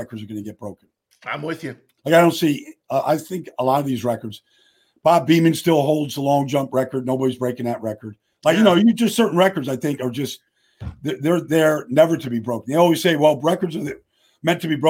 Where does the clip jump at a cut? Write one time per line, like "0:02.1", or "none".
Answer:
0:02.0